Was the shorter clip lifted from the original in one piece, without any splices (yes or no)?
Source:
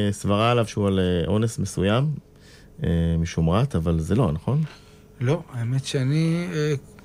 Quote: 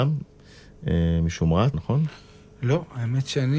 no